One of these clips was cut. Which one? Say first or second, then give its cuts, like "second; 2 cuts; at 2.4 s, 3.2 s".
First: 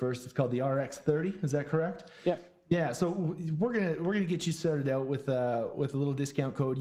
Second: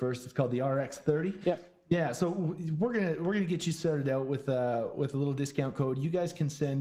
second; 1 cut; at 1.4 s